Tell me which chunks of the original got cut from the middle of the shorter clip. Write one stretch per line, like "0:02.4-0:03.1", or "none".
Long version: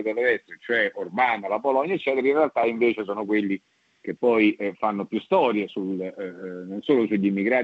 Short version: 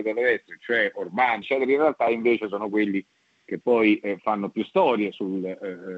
0:01.4-0:02.0